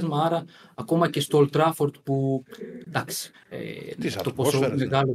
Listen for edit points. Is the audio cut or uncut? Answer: cut